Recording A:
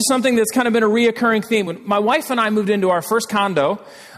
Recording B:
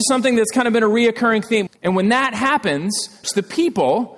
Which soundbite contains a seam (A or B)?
B